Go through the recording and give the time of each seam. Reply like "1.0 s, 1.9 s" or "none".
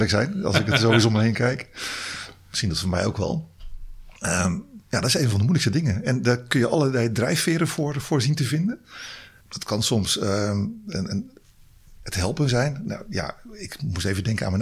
9.4 s